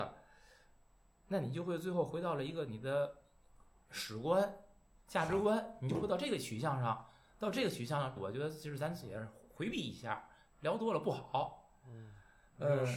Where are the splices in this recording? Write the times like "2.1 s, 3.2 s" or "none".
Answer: 8.2 s